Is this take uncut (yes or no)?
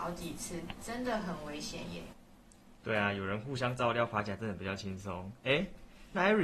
yes